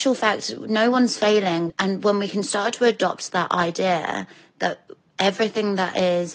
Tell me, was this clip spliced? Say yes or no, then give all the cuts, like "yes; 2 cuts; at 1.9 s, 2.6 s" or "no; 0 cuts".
yes; 1 cut; at 1.7 s